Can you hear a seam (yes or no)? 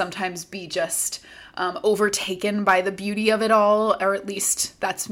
no